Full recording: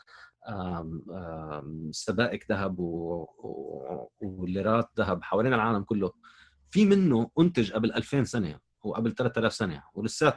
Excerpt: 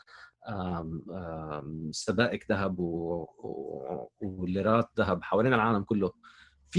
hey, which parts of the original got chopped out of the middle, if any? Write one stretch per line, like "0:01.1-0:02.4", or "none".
none